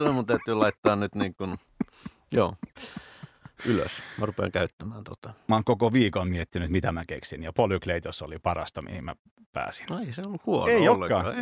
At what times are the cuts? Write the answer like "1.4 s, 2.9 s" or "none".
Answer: none